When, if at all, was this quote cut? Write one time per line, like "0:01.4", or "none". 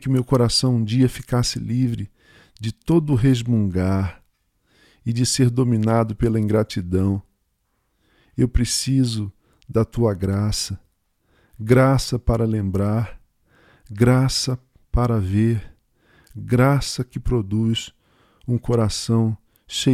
none